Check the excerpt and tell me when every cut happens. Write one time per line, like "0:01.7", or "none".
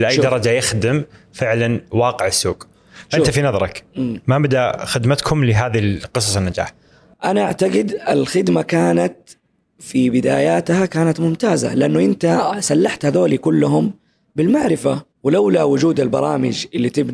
0:15.1